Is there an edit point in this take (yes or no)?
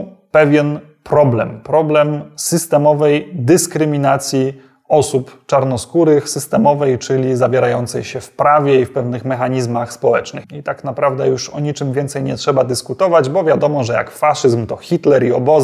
yes